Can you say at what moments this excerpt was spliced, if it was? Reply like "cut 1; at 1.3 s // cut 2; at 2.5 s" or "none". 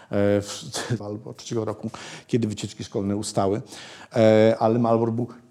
cut 1; at 1.0 s